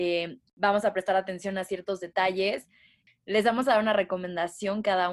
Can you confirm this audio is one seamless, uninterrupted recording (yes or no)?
yes